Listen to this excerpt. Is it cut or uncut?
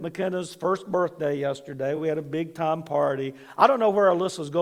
uncut